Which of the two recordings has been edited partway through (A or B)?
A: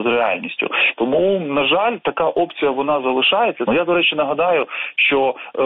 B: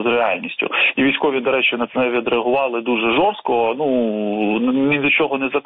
A